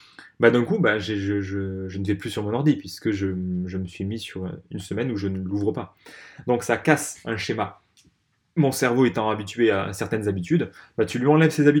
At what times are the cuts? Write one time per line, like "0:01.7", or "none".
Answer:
none